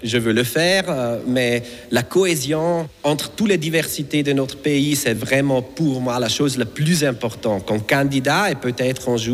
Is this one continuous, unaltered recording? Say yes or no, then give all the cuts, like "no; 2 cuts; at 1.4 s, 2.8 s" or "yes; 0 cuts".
yes; 0 cuts